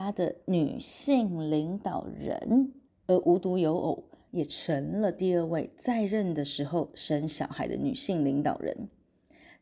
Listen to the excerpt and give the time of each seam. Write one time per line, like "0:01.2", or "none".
0:02.9
0:04.3